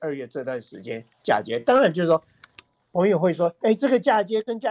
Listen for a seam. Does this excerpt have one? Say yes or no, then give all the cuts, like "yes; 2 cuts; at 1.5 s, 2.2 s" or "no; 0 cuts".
no; 0 cuts